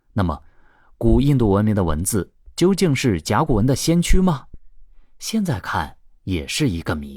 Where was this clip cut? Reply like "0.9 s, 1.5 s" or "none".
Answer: none